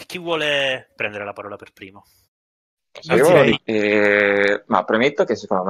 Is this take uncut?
no; 1 cut; at 3.5 s

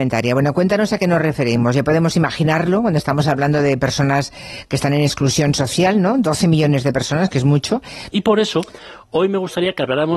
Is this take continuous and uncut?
no; 1 cut; at 8.1 s

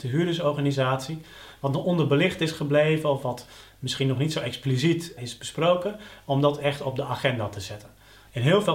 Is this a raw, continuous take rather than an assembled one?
no; 1 cut; at 5.2 s

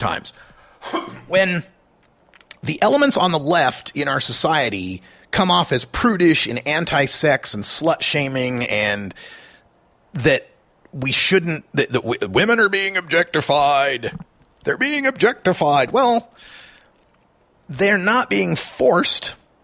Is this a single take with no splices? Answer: yes; 0 cuts

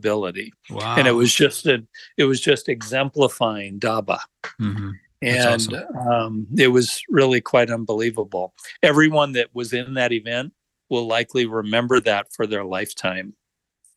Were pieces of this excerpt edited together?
no; 0 cuts

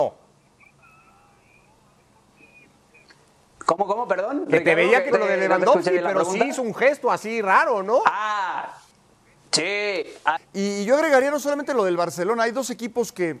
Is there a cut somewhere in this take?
yes; 2 cuts; at 5.1 s, 10.4 s

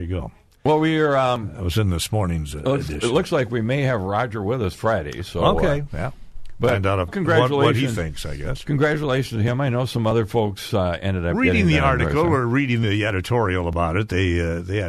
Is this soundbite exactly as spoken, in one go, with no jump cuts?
no; 1 cut; at 7.1 s

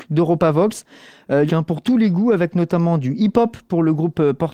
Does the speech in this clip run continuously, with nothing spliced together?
no; 1 cut; at 1.5 s

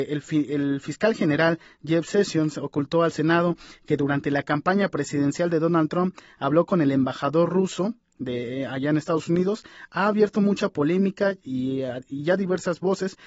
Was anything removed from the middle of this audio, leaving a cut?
no; 0 cuts

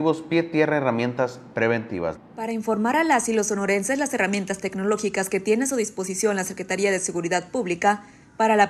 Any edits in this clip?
yes; 1 cut; at 2.2 s

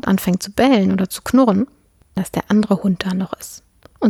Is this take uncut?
no; 1 cut; at 2.2 s

